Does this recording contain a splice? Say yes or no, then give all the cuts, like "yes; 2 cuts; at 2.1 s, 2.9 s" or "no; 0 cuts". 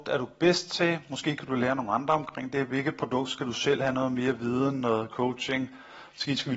no; 0 cuts